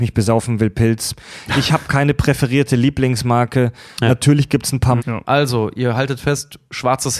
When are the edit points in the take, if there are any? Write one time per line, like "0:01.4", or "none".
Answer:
0:04.0
0:05.0